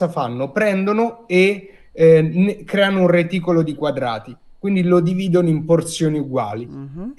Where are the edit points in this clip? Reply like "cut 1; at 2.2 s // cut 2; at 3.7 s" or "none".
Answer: none